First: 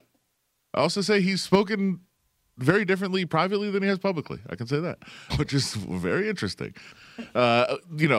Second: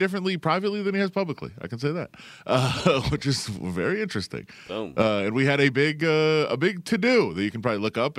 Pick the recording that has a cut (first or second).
first